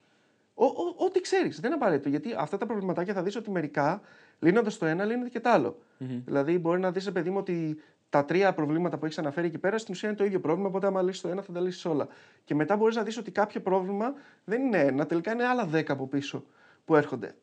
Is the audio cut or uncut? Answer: uncut